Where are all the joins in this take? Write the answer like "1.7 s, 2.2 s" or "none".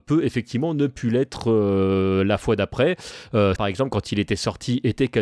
3.6 s